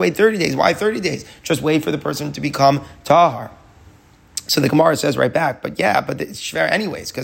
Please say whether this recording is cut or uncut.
uncut